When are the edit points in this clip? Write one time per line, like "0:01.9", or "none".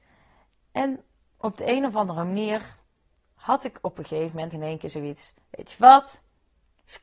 0:04.5